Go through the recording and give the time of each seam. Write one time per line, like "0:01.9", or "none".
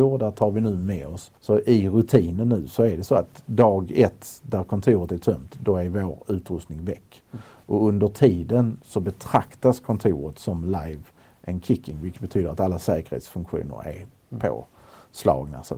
0:01.4